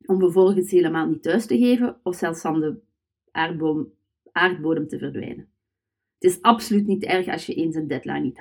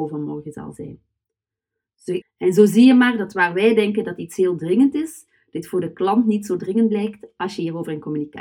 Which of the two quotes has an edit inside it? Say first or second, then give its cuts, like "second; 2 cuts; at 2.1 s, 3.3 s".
second; 1 cut; at 2.2 s